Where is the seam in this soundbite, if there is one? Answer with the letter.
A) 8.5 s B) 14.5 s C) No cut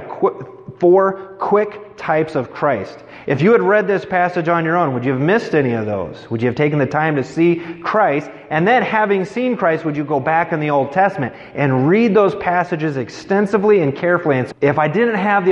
B